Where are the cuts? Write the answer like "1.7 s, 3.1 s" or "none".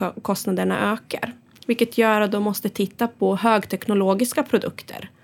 none